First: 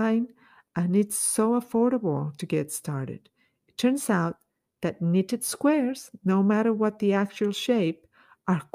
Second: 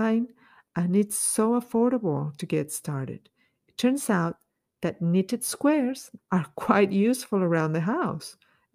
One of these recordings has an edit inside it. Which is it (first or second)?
second